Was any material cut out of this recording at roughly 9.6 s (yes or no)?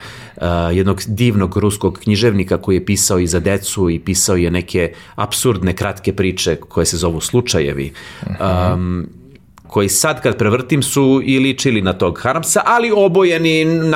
yes